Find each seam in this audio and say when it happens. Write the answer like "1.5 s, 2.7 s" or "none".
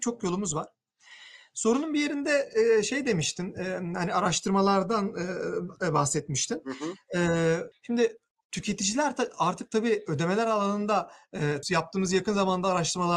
7.7 s, 11.6 s